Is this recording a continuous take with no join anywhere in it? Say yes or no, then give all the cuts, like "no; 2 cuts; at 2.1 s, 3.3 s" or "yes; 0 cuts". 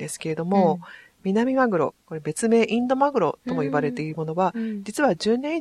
no; 1 cut; at 2.0 s